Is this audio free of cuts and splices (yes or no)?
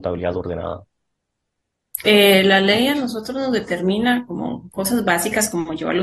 no